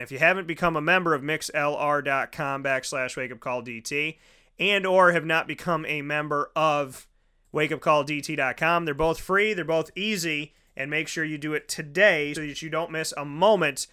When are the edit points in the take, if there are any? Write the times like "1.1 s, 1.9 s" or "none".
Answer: 12.3 s